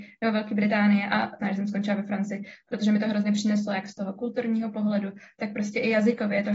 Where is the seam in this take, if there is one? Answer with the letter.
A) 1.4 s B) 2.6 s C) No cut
A